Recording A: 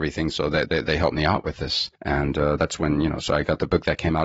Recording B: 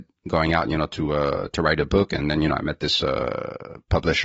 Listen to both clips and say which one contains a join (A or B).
A